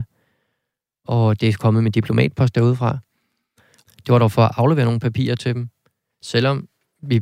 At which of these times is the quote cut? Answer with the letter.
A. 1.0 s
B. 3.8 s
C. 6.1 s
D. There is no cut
B